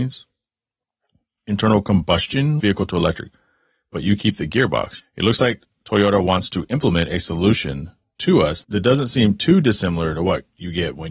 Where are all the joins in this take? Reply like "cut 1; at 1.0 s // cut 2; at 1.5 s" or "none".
cut 1; at 2.6 s // cut 2; at 5.0 s